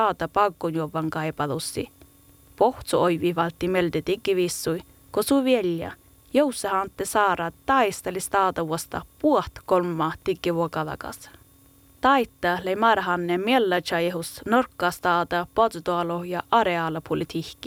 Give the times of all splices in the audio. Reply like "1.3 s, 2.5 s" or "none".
none